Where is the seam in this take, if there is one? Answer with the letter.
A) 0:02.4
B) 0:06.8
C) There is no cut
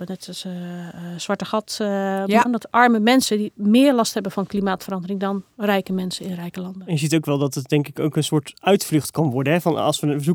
A